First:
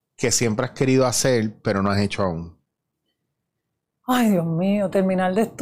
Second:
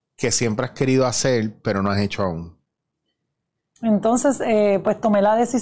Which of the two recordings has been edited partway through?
second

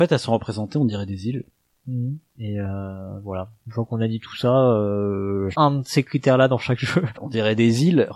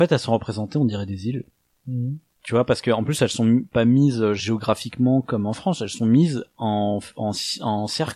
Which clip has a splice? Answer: first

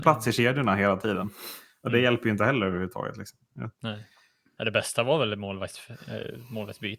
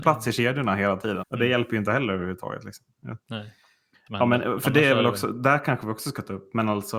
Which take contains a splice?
second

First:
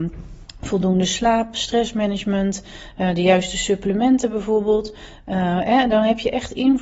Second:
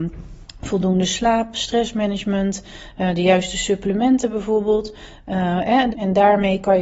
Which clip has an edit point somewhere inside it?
second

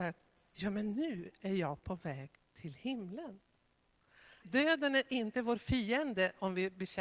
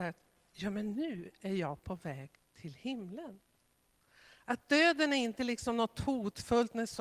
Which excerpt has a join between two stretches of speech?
first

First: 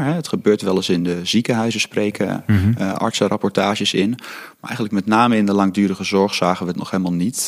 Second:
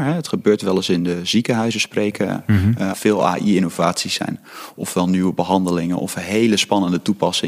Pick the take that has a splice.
second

